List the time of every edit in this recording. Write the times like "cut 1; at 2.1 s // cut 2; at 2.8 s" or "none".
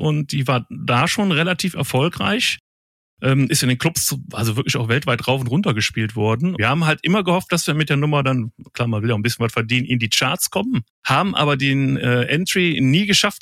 cut 1; at 6.6 s // cut 2; at 10.9 s